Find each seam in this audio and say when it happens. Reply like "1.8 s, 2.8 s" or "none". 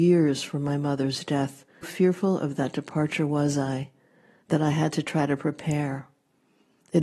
1.8 s